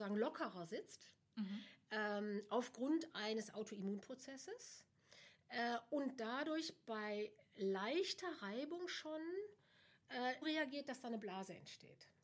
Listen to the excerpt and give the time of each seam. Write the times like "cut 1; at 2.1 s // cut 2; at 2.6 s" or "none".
cut 1; at 10.4 s

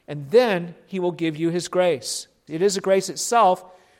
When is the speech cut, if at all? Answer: cut 1; at 2.5 s

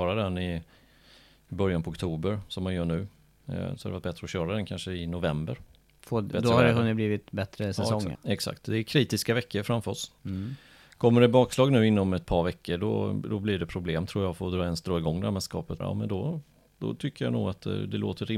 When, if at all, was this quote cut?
cut 1; at 8.1 s // cut 2; at 15.8 s

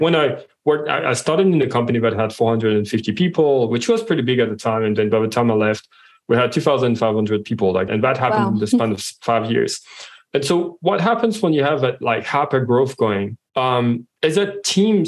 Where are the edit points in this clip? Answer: cut 1; at 7.9 s // cut 2; at 13.5 s

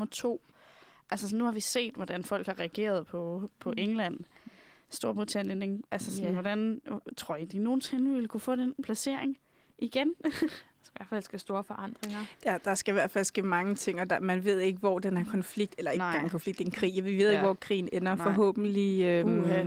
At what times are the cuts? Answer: none

